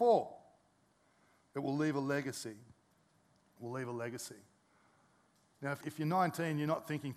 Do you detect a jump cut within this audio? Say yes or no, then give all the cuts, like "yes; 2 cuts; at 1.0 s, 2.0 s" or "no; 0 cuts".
yes; 1 cut; at 5.8 s